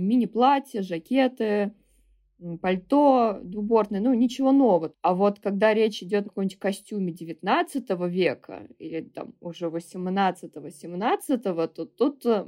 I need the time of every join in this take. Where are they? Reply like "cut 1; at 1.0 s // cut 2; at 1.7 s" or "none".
cut 1; at 4.9 s // cut 2; at 6.2 s